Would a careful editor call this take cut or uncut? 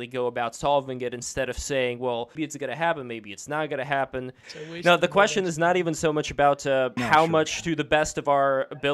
cut